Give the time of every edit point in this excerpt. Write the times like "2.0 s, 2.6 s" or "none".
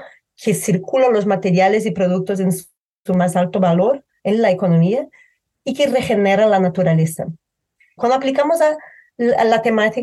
8.0 s